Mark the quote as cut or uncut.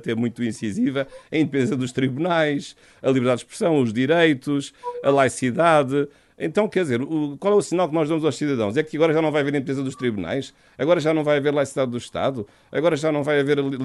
uncut